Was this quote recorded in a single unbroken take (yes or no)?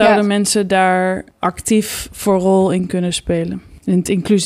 yes